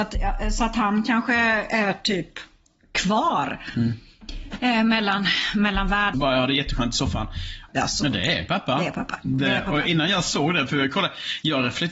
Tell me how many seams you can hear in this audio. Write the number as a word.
two